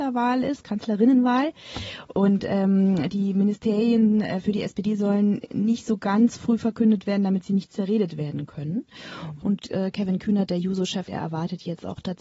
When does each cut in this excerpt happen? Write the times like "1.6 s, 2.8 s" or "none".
9.4 s, 11.0 s

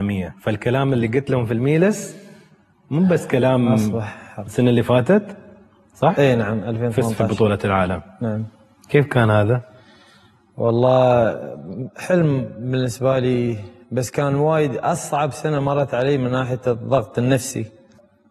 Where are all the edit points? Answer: 4.5 s

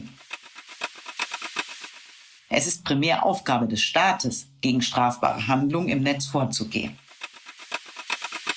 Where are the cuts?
2.5 s

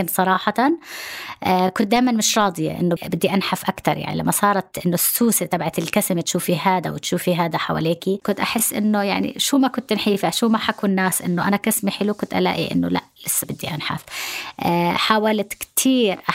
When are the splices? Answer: 3.0 s

